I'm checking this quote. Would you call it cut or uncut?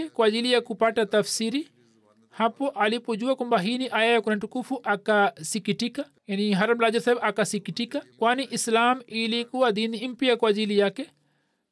cut